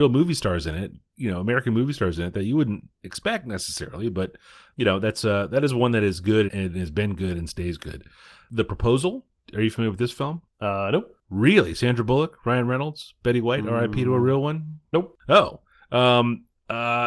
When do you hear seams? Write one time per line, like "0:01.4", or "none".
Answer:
0:06.5